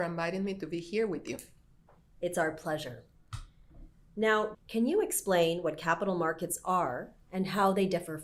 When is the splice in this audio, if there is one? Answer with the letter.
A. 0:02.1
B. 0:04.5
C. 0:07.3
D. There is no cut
B